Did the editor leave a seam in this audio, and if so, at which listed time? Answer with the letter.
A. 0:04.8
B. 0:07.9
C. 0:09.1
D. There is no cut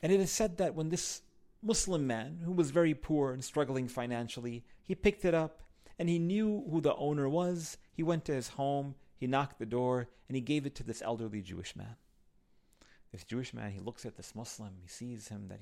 A